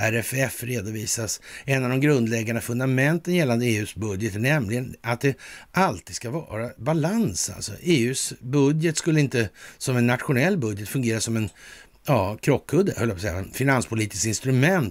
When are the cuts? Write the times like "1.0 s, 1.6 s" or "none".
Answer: none